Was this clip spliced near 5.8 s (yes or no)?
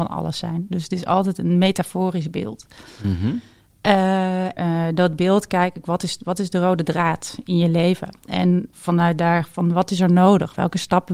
no